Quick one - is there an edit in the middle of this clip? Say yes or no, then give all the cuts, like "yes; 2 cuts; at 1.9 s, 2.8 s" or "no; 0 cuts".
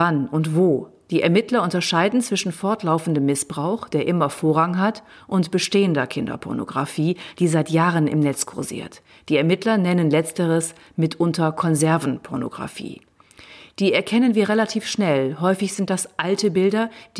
no; 0 cuts